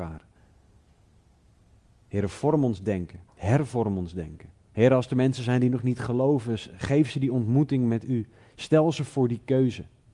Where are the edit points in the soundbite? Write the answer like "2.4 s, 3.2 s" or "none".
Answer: 2.0 s, 4.6 s